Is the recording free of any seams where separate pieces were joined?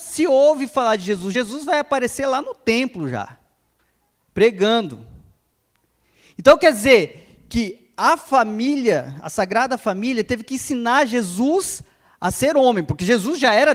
yes; 0 cuts

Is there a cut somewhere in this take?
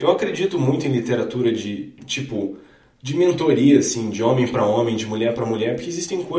no; 0 cuts

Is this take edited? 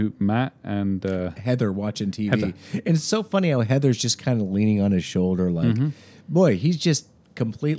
no; 0 cuts

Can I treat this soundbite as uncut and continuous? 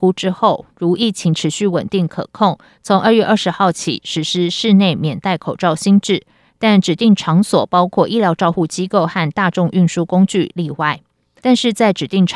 no; 1 cut; at 11.4 s

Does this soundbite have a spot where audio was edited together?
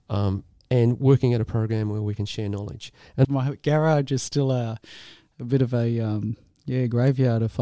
yes; 1 cut; at 3.2 s

